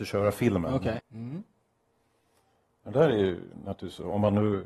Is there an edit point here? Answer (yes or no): yes